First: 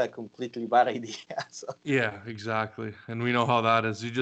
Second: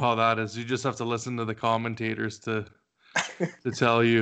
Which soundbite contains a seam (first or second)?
first